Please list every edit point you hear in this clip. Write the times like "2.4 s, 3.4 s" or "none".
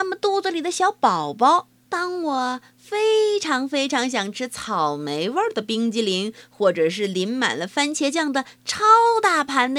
1.9 s